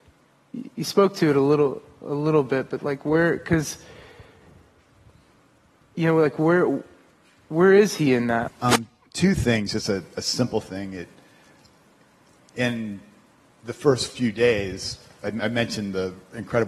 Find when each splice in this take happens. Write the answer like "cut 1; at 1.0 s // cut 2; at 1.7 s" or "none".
cut 1; at 8.5 s